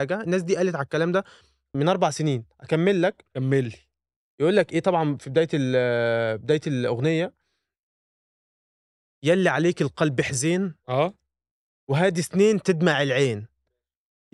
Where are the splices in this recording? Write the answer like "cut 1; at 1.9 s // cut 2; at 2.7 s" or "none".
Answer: cut 1; at 1.7 s